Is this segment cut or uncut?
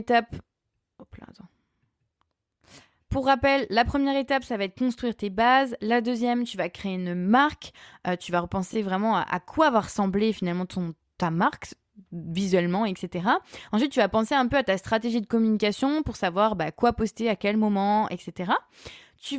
uncut